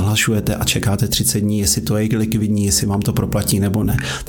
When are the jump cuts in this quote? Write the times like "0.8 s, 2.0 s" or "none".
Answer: none